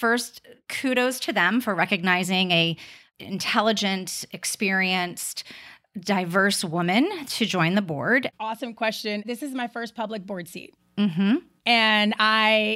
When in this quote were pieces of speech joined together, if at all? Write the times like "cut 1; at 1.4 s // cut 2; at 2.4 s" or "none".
cut 1; at 8.3 s